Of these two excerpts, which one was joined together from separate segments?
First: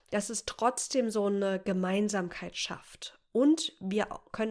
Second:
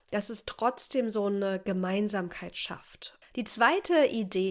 second; 1 cut; at 3.2 s

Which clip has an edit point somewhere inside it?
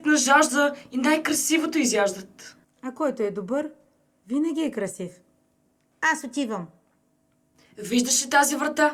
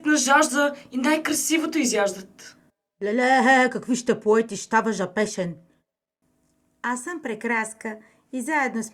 first; 2 cuts; at 2.6 s, 5.9 s

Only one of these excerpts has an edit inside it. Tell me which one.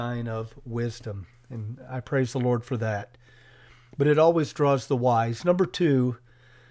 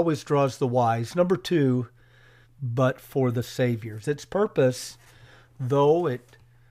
second; 1 cut; at 2.4 s

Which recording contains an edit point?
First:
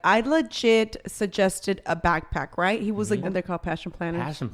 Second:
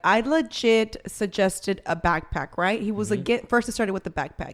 first; 1 cut; at 3.2 s

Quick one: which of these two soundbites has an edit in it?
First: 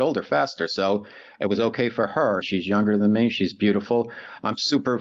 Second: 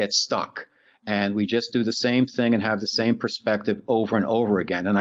first; 1 cut; at 2.4 s

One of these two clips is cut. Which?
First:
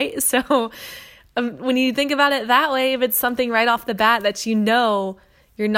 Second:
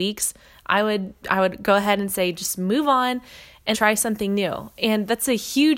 second; 1 cut; at 3.7 s

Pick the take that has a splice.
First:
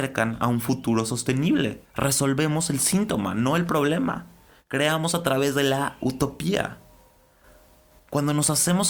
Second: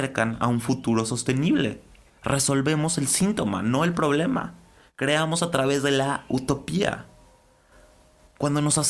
first; 1 cut; at 1.8 s

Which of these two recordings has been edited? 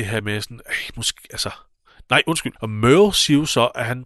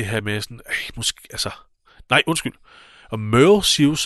first; 1 cut; at 2.6 s

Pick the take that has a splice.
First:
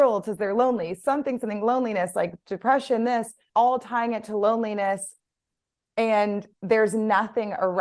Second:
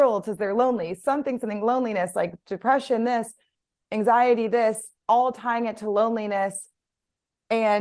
first; 2 cuts; at 3.5 s, 6.5 s

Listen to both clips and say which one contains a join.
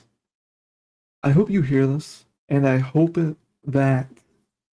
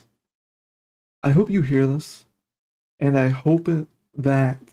first; 1 cut; at 2.3 s

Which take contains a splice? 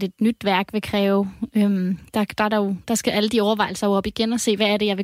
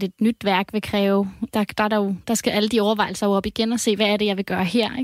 second; 1 cut; at 1.5 s

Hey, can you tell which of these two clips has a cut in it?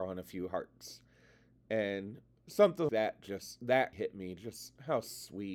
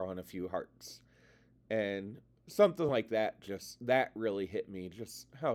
first; 2 cuts; at 2.9 s, 3.9 s

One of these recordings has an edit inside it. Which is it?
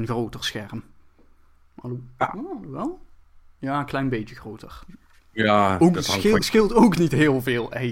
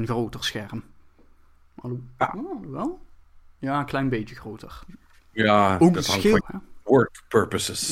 second; 1 cut; at 6.4 s

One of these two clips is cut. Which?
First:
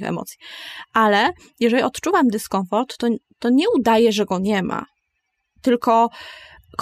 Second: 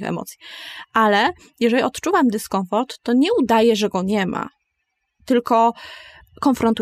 second; 1 cut; at 3.0 s

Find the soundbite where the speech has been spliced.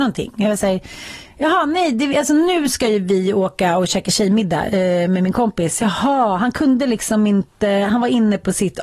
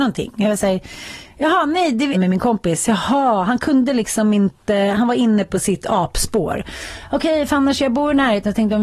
second; 1 cut; at 2.1 s

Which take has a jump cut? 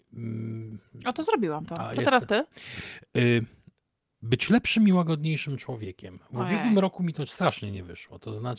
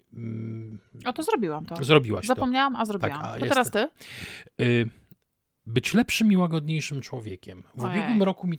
first; 1 cut; at 1.8 s

